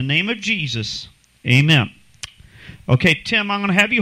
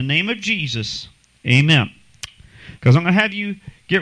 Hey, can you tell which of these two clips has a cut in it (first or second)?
second